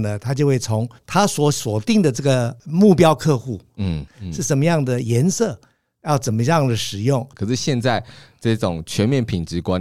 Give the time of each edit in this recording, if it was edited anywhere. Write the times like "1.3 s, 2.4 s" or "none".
1.0 s, 4.1 s, 7.3 s